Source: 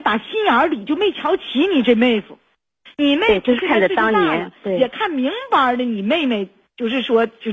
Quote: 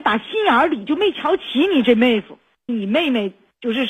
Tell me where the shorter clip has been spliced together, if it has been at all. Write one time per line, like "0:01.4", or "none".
0:02.7